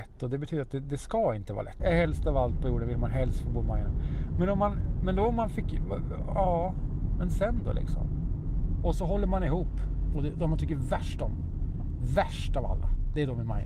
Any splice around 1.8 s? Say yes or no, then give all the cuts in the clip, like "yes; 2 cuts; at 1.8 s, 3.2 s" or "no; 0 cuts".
yes; 3 cuts; at 1.8 s, 8.8 s, 10.1 s